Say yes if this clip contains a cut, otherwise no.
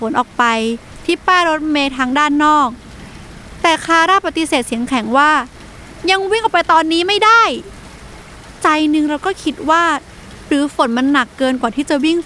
no